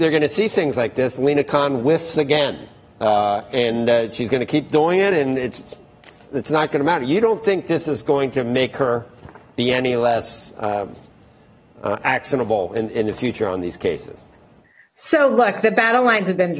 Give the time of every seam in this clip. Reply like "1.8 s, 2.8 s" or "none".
none